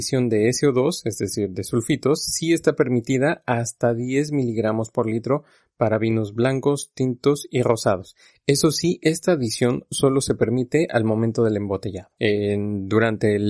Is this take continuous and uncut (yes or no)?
yes